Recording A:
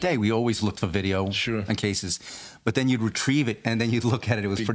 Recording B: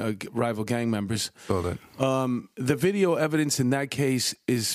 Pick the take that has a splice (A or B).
B